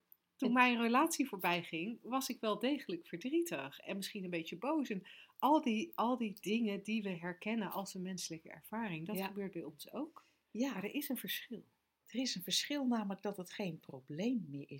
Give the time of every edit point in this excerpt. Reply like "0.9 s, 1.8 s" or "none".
none

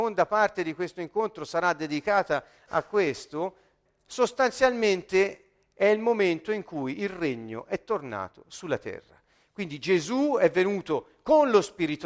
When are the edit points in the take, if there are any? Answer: 3.9 s

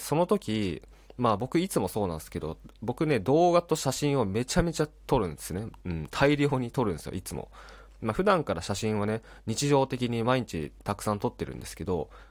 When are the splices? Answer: none

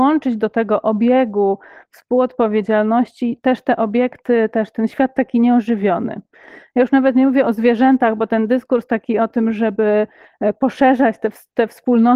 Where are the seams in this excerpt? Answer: none

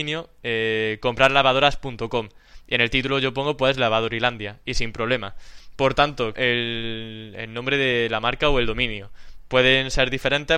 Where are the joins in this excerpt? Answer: 6.3 s

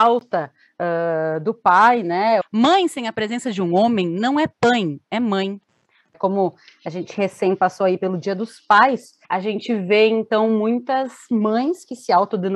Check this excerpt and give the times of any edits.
2.4 s, 6.1 s, 9.2 s

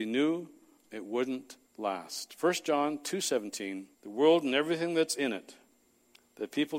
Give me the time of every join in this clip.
1.7 s, 3.9 s

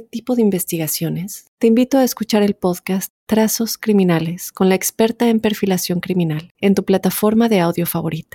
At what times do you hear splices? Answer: 6.5 s

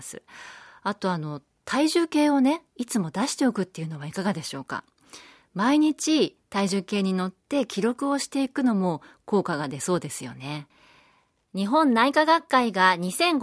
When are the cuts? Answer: none

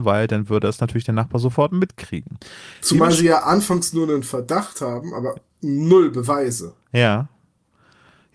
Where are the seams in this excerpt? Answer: none

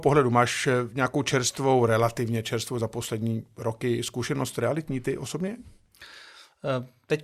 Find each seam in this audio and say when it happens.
none

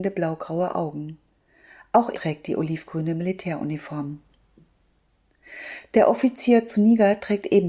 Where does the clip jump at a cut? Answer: 2.1 s

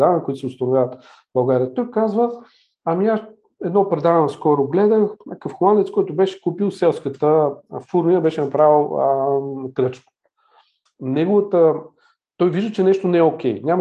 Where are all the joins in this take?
10.9 s

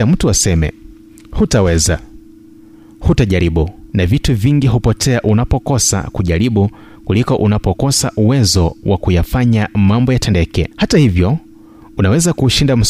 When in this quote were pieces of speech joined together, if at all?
3.9 s, 10.7 s

